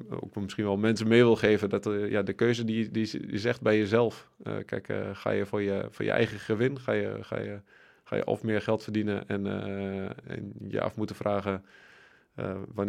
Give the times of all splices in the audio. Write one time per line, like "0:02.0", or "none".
0:10.2